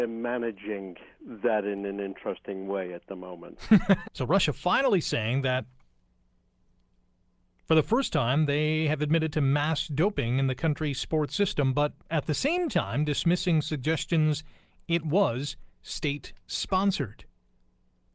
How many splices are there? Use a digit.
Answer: 2